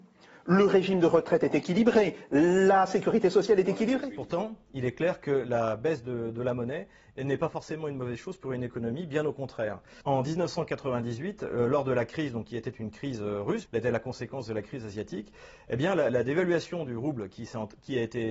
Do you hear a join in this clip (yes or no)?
yes